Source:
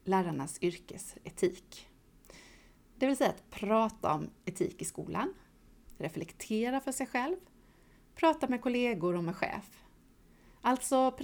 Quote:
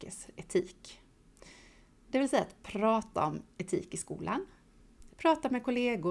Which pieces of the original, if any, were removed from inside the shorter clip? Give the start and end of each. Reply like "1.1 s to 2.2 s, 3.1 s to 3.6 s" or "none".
6.0 s to 8.1 s